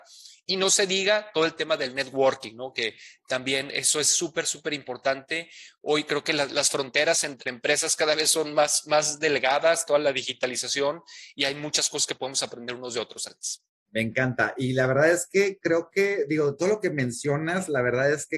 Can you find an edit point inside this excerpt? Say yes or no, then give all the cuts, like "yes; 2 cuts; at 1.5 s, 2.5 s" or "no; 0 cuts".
no; 0 cuts